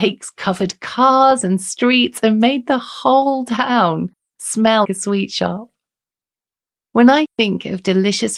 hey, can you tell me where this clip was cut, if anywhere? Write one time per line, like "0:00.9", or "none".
0:04.8